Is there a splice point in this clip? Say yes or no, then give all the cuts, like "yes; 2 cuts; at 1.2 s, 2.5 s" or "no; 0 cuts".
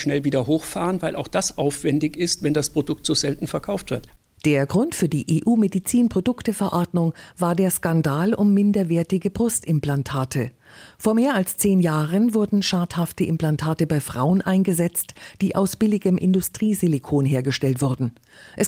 no; 0 cuts